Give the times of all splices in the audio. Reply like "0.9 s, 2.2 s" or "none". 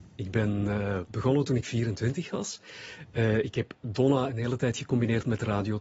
none